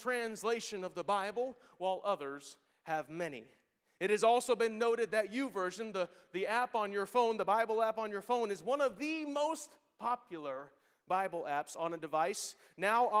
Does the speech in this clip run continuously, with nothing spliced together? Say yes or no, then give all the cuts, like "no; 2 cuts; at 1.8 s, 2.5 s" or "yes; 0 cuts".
yes; 0 cuts